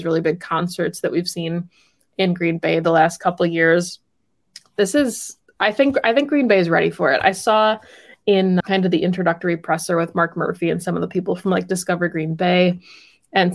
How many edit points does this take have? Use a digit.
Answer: 1